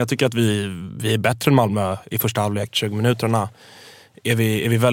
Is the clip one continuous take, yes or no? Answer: no